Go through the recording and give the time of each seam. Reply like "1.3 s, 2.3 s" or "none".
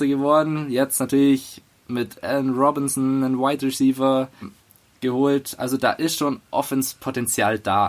4.4 s